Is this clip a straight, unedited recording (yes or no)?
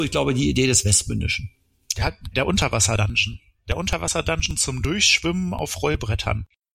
no